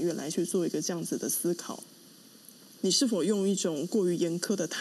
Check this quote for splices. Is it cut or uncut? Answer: cut